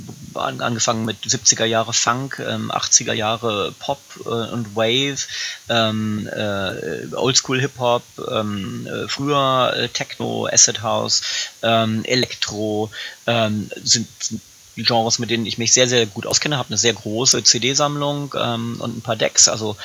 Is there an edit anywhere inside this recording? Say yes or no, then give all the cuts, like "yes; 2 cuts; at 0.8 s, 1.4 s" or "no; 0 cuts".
no; 0 cuts